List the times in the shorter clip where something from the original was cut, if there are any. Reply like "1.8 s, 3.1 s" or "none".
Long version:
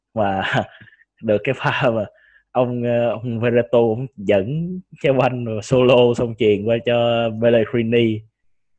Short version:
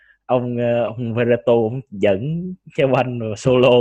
none